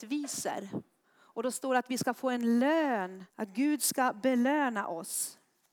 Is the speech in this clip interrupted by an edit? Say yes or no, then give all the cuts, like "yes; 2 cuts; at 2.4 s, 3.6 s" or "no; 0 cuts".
yes; 2 cuts; at 1.0 s, 3.3 s